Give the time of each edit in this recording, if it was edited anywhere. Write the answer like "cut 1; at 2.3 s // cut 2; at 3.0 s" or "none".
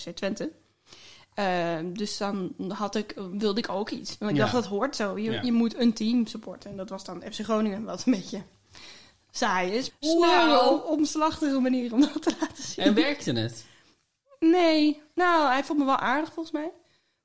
cut 1; at 9.9 s